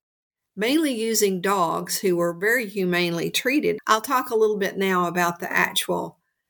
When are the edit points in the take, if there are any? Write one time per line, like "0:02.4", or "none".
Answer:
0:03.8